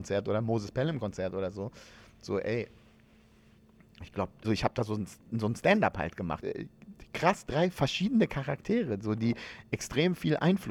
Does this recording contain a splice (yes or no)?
yes